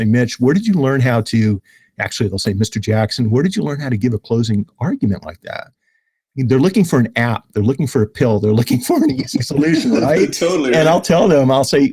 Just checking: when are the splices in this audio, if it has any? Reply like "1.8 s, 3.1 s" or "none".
none